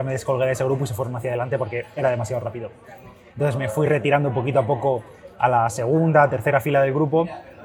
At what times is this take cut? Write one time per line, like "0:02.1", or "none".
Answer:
0:03.3